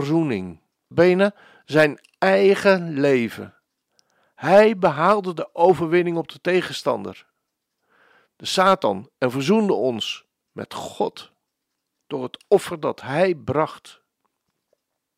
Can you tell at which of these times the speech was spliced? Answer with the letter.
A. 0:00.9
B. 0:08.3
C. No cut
A